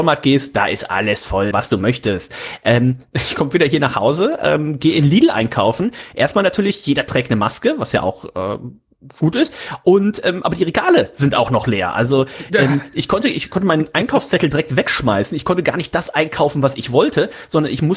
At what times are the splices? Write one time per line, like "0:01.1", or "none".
0:01.5

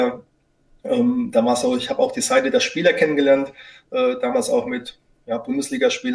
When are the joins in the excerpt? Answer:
none

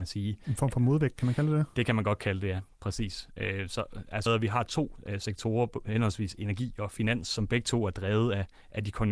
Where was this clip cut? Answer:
0:04.3

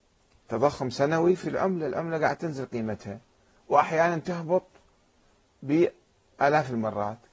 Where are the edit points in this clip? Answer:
none

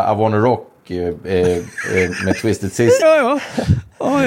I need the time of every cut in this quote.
0:03.0

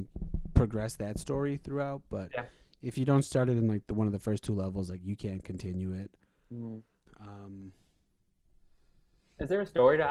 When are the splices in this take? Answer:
0:07.1

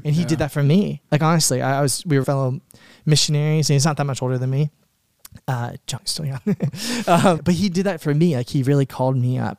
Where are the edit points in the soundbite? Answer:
0:02.2
0:06.0
0:07.4

